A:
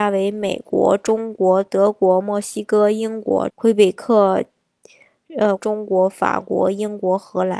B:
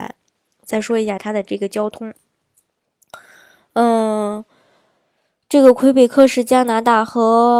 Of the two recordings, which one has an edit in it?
A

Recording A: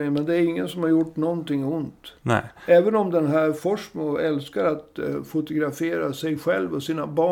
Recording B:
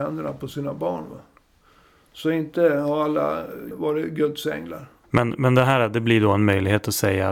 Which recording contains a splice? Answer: B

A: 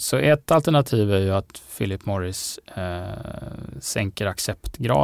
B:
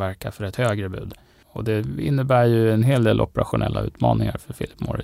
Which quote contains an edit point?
B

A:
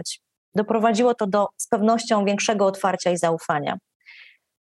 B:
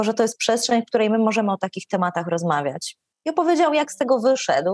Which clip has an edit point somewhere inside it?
B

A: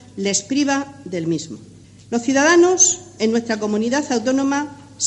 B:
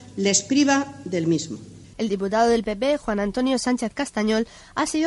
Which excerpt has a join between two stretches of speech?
B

